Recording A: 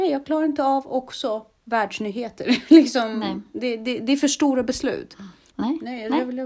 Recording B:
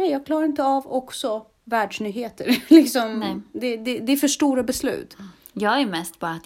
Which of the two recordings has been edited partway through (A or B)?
A